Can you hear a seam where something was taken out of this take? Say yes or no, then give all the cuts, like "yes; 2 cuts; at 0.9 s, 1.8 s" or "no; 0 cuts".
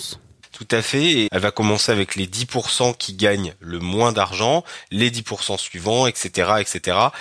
yes; 1 cut; at 1.3 s